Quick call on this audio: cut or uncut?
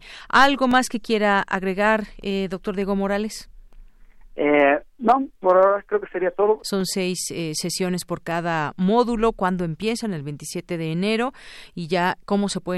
cut